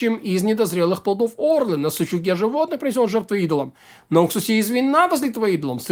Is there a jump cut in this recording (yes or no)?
no